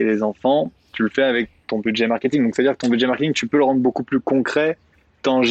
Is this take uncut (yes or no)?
yes